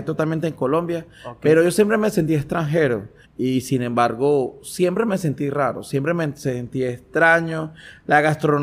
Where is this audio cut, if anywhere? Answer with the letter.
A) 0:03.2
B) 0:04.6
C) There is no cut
A